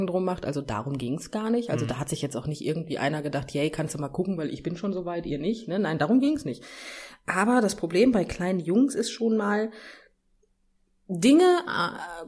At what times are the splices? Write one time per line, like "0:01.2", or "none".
none

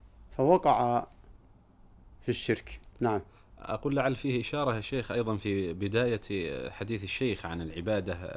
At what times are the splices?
0:02.9

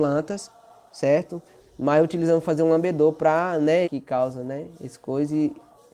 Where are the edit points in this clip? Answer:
0:01.6
0:03.8

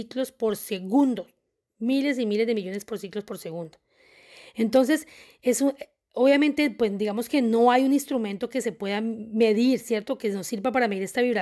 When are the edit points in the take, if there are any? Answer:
none

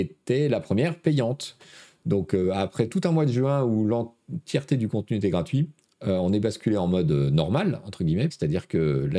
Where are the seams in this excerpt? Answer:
0:08.3

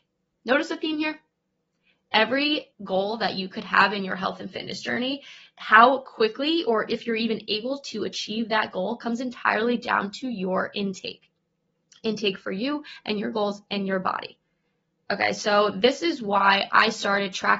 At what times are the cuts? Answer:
0:02.7

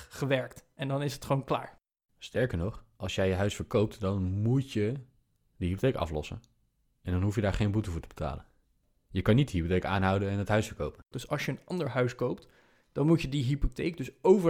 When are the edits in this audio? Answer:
0:11.1

